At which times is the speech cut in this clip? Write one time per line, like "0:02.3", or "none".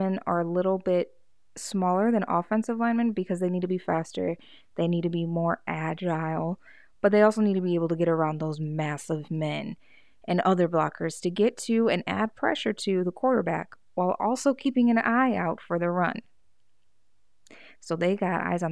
none